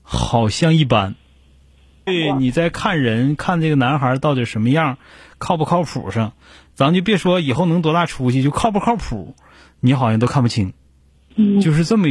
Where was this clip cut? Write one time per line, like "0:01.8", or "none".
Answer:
0:02.1